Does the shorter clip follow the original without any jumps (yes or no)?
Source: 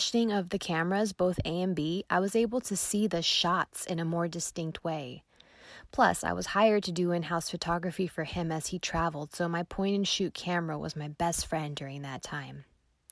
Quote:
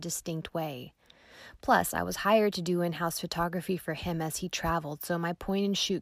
yes